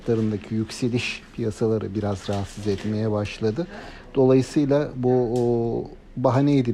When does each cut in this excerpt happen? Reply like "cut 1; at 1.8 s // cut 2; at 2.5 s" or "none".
none